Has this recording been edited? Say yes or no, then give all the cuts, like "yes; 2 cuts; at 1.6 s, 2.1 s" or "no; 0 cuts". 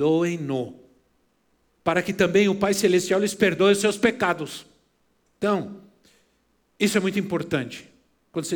no; 0 cuts